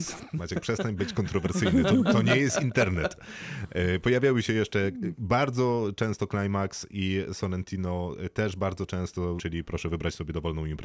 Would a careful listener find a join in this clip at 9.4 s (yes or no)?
yes